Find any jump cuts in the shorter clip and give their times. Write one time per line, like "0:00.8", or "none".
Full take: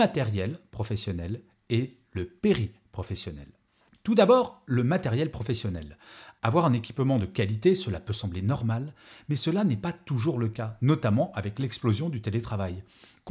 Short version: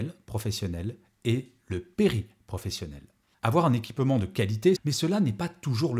0:03.3
0:04.8

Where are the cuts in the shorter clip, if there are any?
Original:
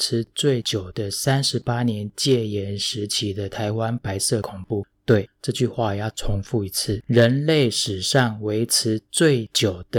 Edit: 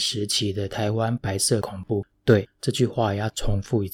none

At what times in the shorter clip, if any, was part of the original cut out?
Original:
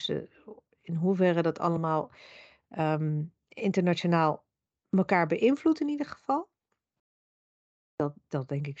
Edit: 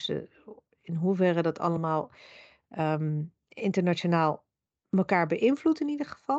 none

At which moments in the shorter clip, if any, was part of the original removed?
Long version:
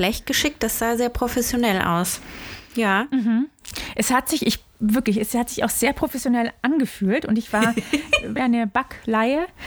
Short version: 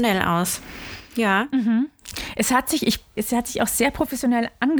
0:03.2

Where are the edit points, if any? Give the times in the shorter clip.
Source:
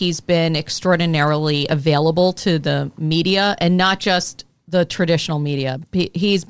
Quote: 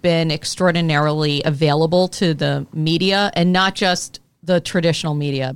none

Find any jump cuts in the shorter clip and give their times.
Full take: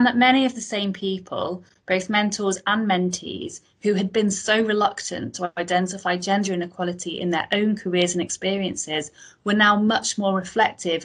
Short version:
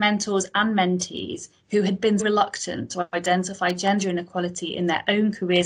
0:02.2

